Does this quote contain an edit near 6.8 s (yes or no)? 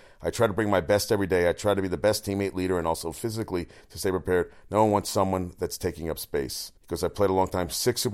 yes